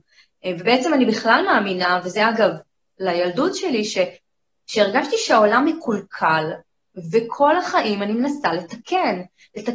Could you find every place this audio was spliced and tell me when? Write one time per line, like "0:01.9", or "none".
0:02.8